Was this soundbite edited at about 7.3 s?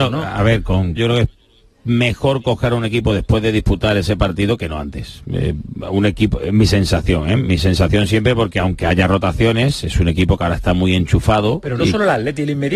no; 1 cut; at 1.0 s

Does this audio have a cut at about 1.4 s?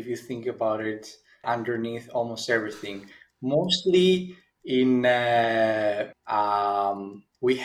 yes; 2 cuts; at 1.4 s, 6.1 s

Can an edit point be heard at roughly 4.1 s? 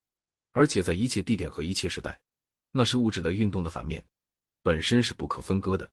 no; 1 cut; at 2.6 s

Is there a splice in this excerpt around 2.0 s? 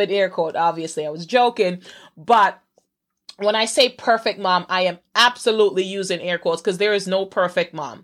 no; 0 cuts

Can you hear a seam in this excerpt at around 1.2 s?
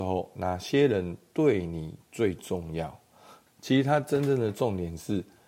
no; 1 cut; at 3.5 s

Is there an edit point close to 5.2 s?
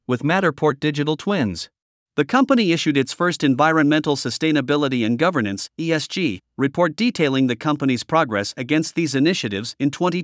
no; 1 cut; at 2.0 s

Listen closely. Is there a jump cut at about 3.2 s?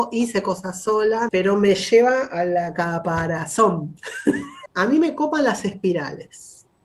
no; 2 cuts; at 1.3 s, 4.7 s

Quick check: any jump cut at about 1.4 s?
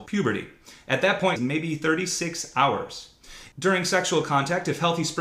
yes; 1 cut; at 1.4 s

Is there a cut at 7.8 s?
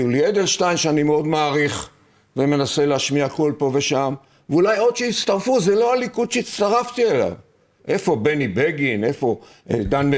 yes; 1 cut; at 7.8 s

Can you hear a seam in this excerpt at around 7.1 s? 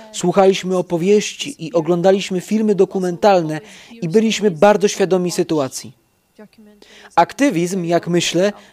no; 0 cuts

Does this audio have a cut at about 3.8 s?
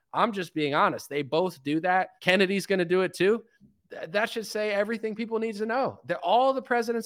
no; 1 cut; at 2.2 s

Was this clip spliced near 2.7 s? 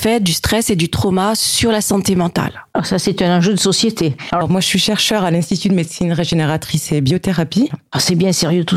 no; 2 cuts; at 4.4 s, 7.7 s

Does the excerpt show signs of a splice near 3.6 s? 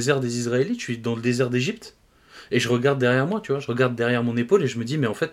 no; 0 cuts

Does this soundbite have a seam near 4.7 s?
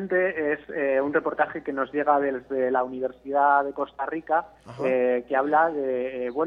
no; 0 cuts

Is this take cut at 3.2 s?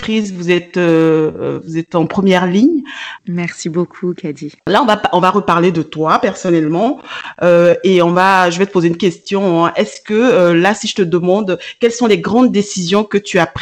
yes; 2 cuts; at 3.2 s, 4.6 s

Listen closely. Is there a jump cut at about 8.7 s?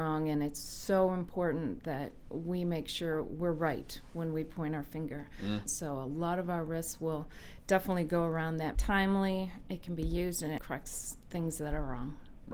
yes; 3 cuts; at 5.7 s, 8.7 s, 10.6 s

